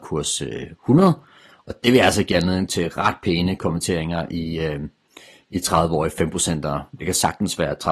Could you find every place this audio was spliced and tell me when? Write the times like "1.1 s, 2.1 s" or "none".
none